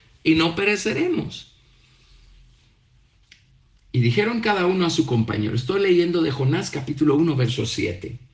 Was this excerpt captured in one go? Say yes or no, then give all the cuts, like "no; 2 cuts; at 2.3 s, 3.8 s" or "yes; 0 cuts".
yes; 0 cuts